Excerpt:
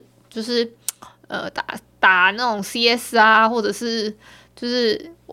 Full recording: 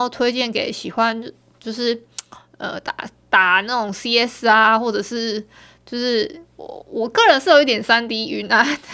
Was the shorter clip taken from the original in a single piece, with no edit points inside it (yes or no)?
yes